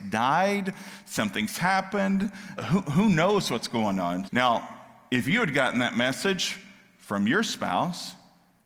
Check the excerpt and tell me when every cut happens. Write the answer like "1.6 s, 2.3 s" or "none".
2.6 s, 4.3 s

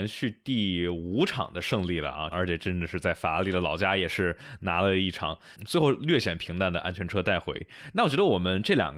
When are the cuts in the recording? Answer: 2.3 s, 5.5 s

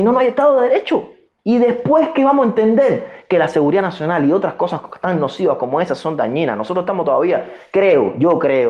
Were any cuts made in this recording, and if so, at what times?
none

